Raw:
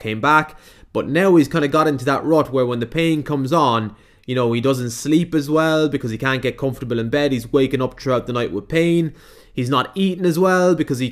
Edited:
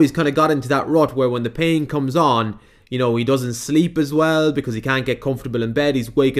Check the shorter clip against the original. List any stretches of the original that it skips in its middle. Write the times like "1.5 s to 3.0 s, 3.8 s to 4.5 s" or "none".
none